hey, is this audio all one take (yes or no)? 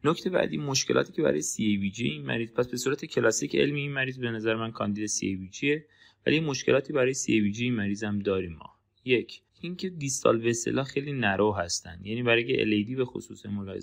no